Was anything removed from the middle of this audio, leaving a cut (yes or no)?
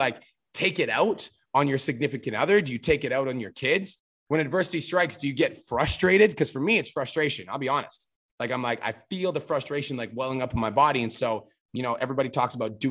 yes